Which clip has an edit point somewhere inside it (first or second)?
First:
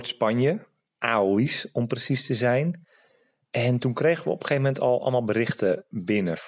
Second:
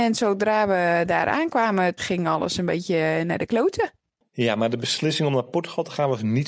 second